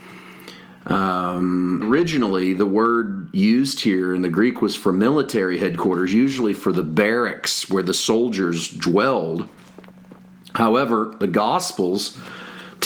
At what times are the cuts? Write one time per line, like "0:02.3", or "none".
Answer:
0:01.8